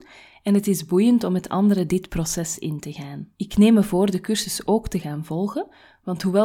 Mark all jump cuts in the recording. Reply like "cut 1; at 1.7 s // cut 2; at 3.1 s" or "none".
cut 1; at 3.3 s